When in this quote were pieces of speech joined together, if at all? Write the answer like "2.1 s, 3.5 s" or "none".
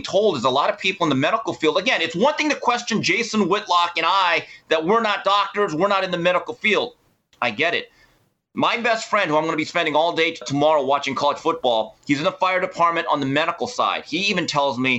10.4 s